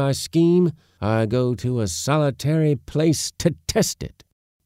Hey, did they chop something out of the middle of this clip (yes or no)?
no